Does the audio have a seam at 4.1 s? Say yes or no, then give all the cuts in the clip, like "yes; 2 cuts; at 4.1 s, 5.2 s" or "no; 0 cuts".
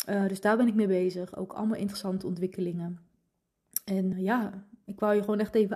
yes; 1 cut; at 4.1 s